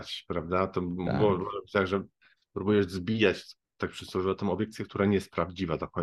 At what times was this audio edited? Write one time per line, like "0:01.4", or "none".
none